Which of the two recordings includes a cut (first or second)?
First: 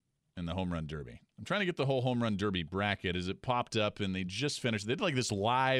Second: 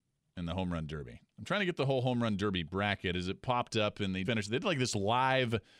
second